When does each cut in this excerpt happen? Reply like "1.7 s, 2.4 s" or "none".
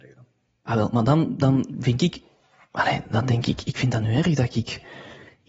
none

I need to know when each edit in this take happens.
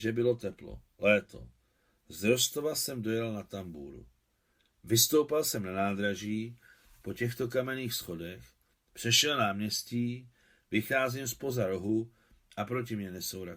none

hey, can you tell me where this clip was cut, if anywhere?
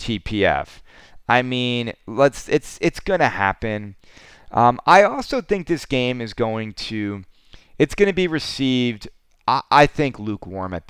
none

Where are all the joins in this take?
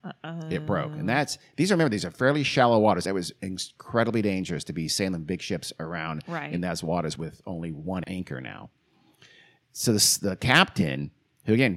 3.0 s

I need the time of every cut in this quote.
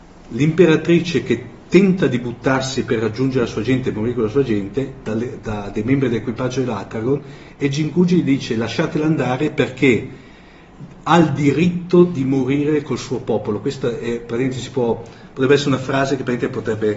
5.0 s

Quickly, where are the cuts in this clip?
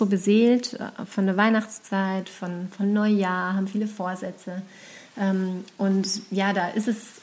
none

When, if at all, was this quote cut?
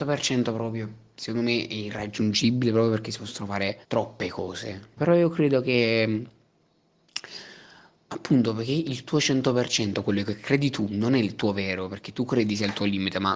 3.8 s, 5.0 s

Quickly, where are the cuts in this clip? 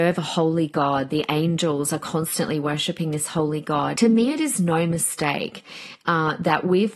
3.9 s

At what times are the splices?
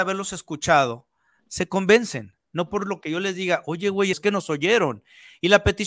4.1 s

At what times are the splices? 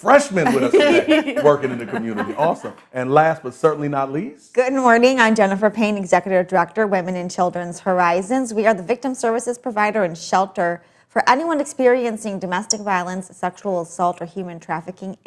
none

